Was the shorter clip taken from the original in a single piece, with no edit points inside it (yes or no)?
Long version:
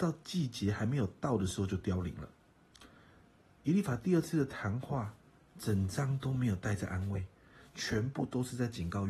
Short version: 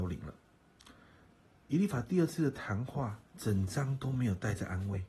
no